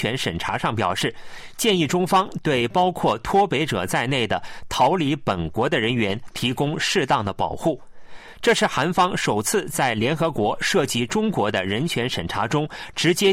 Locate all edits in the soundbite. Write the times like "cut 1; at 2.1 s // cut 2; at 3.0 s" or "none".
none